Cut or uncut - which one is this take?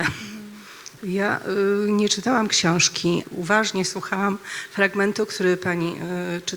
cut